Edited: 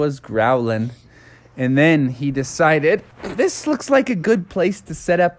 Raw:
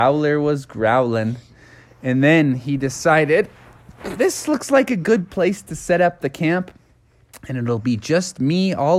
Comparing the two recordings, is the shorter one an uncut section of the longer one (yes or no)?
no